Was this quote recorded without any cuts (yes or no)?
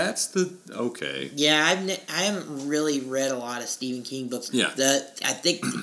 no